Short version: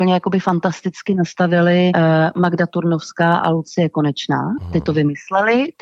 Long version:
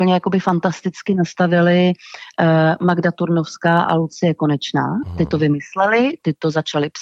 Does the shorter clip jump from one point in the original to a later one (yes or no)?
yes